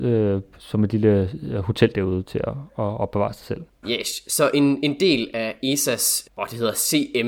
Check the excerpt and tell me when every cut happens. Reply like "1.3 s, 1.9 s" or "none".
3.8 s, 6.2 s

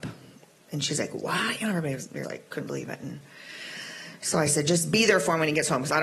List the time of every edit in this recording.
2.2 s

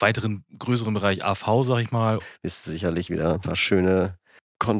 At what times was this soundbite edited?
2.2 s

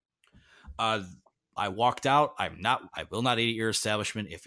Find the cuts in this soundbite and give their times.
1.6 s, 2.9 s

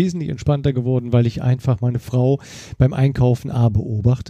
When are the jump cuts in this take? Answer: none

